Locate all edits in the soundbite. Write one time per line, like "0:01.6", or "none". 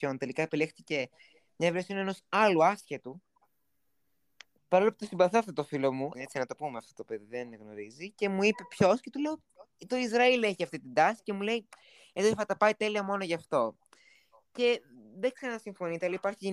0:04.6
0:06.1